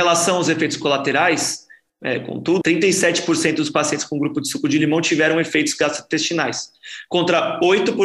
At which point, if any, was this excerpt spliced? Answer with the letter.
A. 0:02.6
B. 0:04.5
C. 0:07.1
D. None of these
A